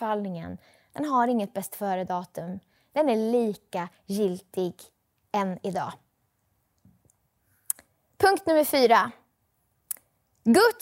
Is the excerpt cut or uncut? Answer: uncut